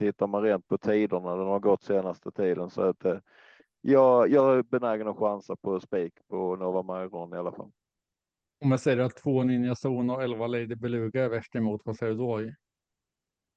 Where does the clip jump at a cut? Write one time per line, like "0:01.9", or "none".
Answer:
none